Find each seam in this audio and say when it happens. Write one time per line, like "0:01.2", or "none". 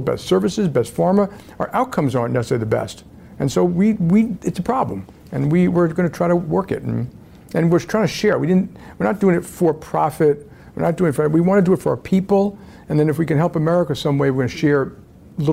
none